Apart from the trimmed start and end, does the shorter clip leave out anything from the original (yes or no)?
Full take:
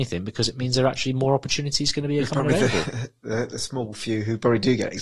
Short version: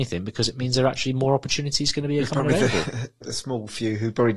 yes